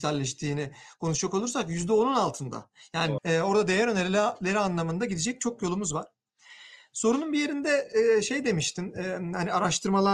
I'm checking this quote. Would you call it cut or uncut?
cut